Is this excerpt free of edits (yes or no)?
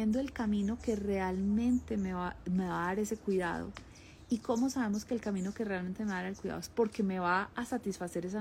yes